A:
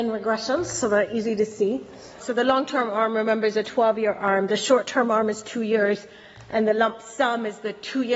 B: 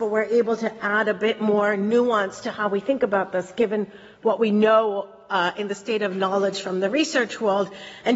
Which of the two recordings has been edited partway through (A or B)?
A